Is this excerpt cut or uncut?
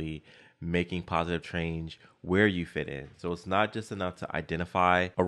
uncut